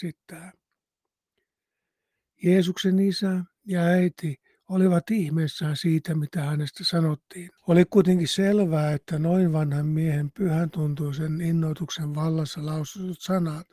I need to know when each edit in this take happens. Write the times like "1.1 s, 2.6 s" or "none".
7.6 s